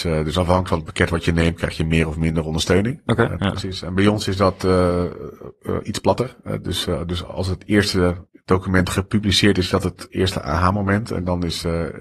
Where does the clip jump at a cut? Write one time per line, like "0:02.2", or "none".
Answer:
0:03.4